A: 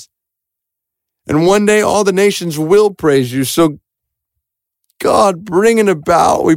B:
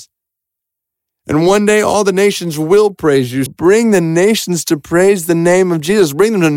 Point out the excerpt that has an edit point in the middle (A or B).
B